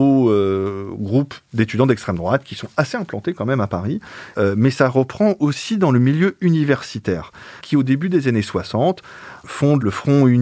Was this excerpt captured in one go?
no; 2 cuts; at 4.3 s, 7.6 s

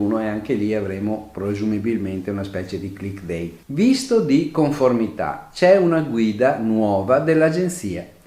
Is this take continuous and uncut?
no; 1 cut; at 3.6 s

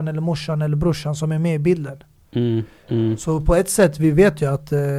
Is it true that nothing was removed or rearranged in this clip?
yes; 0 cuts

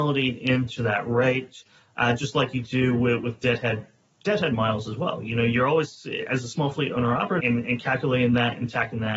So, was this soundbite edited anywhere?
yes; 1 cut; at 7.4 s

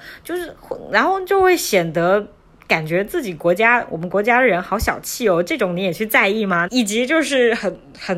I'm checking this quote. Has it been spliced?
yes; 1 cut; at 6.7 s

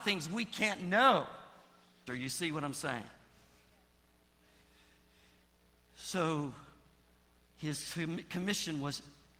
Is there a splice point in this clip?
yes; 1 cut; at 2.1 s

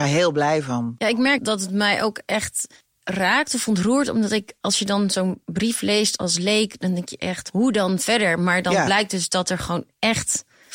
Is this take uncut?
yes; 0 cuts

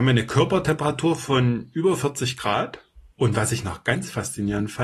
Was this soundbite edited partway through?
yes; 1 cut; at 3.1 s

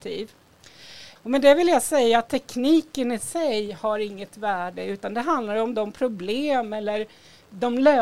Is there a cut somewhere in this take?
yes; 1 cut; at 1.2 s

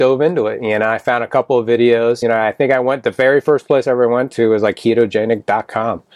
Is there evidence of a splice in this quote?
no; 0 cuts

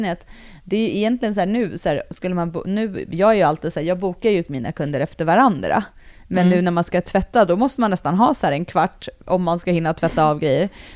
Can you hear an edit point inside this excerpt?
no; 0 cuts

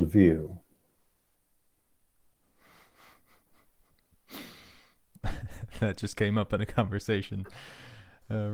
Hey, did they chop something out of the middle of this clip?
no; 0 cuts

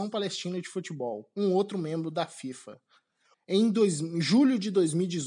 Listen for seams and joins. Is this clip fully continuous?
no; 1 cut; at 3.3 s

